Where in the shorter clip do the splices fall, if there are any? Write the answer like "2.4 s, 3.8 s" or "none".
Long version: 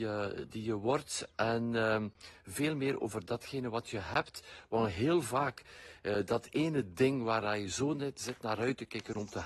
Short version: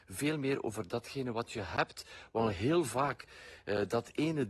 none